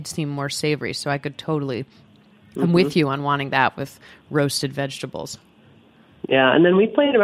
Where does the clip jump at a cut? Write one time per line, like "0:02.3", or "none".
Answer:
none